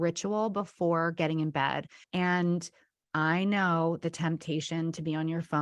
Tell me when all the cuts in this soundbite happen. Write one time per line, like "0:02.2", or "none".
0:02.0